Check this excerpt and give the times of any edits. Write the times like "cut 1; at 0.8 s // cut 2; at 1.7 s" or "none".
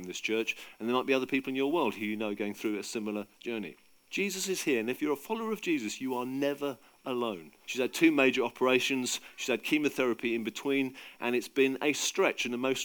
cut 1; at 4.1 s // cut 2; at 7.6 s